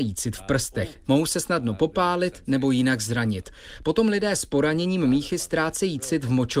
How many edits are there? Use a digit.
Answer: 1